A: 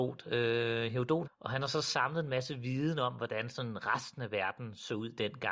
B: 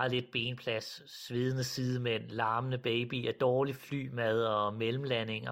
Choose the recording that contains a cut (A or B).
A